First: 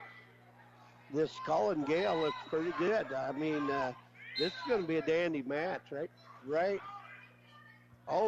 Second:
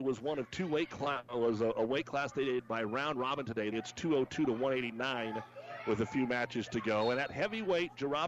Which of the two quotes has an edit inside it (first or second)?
second